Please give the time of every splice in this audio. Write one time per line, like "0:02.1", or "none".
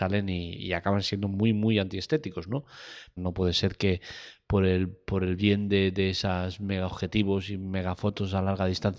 0:03.2